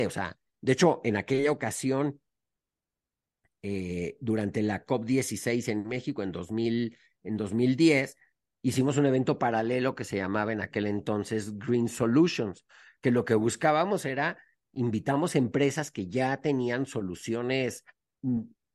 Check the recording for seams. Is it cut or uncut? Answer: uncut